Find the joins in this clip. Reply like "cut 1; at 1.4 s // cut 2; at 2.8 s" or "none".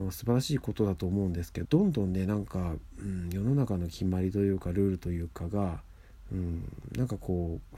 cut 1; at 1.6 s